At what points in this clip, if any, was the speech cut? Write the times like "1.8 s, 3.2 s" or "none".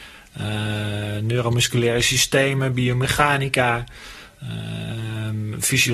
none